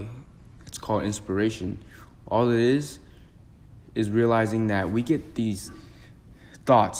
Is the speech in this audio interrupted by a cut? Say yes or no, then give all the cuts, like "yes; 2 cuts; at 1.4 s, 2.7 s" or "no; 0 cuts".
no; 0 cuts